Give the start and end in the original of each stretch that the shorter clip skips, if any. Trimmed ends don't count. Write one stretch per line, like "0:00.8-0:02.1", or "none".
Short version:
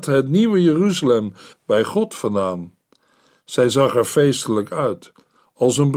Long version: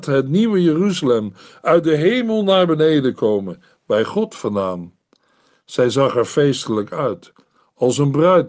0:01.5-0:03.7